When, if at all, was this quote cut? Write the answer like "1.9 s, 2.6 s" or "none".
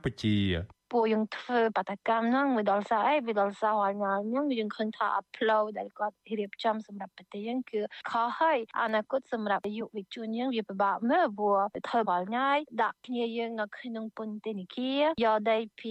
12.0 s